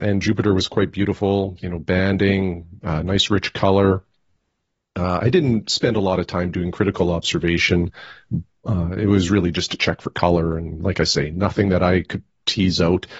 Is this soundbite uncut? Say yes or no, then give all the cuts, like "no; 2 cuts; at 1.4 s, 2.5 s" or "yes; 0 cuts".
yes; 0 cuts